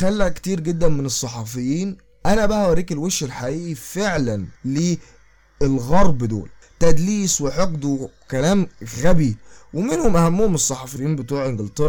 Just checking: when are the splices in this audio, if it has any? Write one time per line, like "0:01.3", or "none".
0:04.6